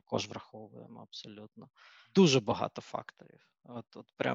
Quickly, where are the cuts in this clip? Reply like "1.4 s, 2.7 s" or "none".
none